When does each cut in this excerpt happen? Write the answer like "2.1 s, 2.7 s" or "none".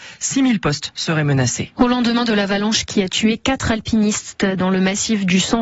1.8 s